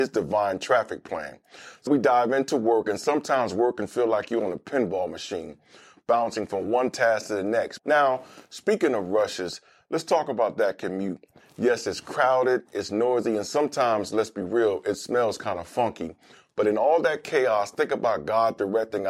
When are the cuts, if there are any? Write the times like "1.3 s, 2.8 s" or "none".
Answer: 1.9 s, 7.8 s